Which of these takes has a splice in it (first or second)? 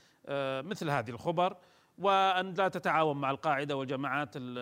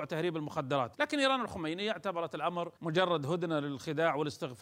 second